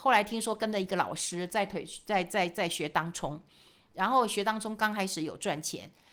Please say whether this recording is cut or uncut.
uncut